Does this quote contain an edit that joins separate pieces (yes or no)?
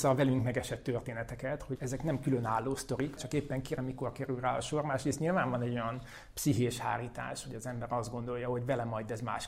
yes